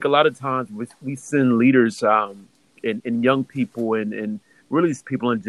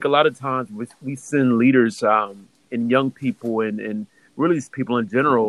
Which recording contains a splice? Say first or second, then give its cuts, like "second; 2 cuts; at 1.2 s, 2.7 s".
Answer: second; 1 cut; at 2.7 s